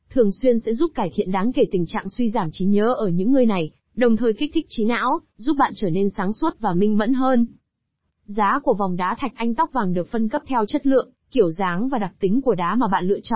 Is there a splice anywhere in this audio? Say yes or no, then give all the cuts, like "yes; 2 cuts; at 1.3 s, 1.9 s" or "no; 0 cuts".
yes; 1 cut; at 8.1 s